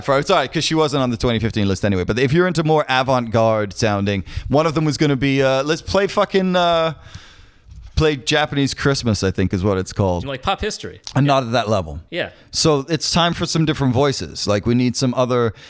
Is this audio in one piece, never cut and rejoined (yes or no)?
no